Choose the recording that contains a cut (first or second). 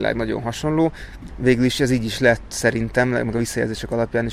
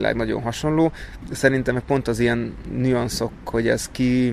first